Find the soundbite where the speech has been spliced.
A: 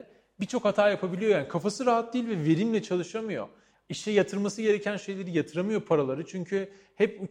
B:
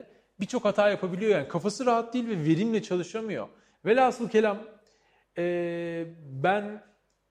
B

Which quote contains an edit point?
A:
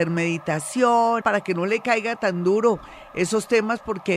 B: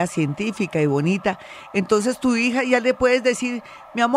A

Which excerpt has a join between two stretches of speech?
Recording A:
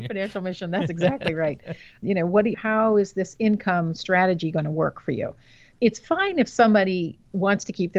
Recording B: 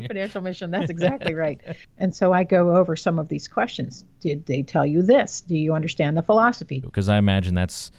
B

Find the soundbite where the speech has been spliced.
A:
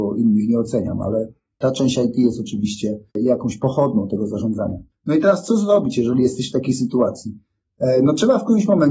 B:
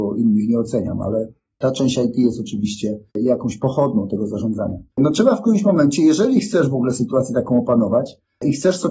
B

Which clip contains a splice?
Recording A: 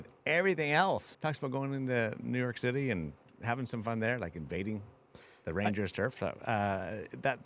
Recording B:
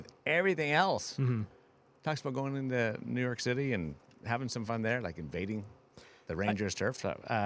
A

